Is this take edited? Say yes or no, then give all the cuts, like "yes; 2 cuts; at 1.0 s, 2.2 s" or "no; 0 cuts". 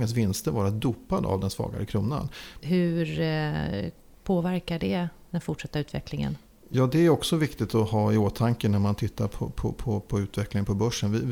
yes; 1 cut; at 2.6 s